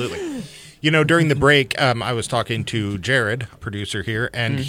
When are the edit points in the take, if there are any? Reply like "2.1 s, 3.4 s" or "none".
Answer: 3.6 s